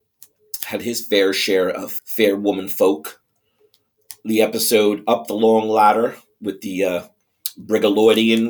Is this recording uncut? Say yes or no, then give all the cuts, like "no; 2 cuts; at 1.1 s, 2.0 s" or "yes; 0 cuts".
no; 1 cut; at 2.0 s